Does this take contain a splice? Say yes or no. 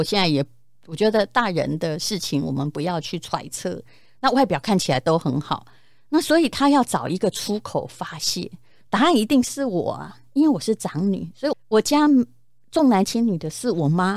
yes